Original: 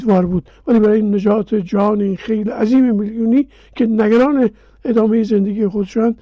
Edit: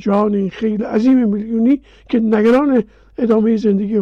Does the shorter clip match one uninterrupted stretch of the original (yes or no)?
yes